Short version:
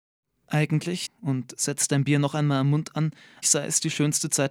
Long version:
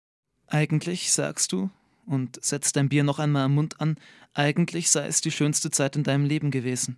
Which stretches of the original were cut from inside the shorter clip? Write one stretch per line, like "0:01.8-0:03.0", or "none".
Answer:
0:01.1-0:01.9
0:04.3-0:04.8